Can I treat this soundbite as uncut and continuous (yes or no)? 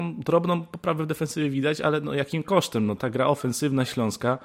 no